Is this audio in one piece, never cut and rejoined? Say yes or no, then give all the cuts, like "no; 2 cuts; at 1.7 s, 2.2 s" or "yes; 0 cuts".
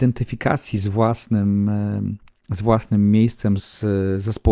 no; 1 cut; at 3.6 s